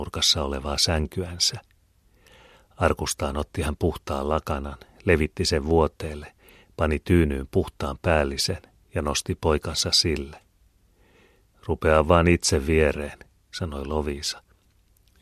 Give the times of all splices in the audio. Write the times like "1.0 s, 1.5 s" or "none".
none

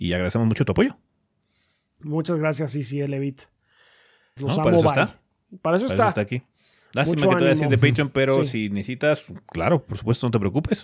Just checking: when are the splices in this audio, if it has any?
4.4 s

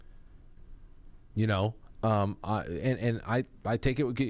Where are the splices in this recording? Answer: 1.3 s

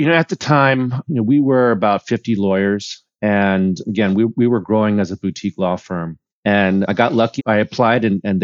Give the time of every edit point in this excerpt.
6.3 s, 7.4 s

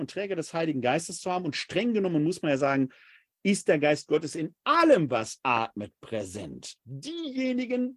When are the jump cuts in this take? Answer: 6.8 s

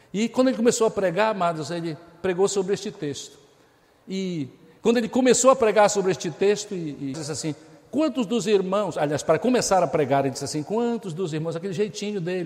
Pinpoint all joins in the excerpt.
7.1 s

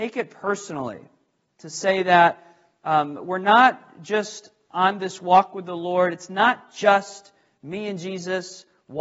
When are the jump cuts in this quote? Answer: none

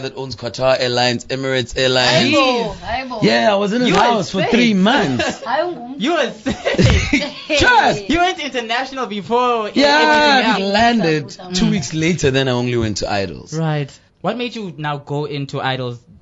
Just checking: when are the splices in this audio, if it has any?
10.5 s, 14.1 s

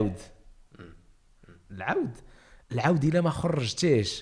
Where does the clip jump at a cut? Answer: 2.6 s

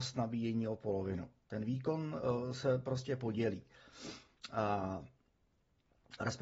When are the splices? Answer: none

